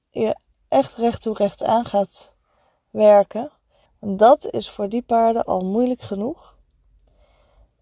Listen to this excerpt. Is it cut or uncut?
cut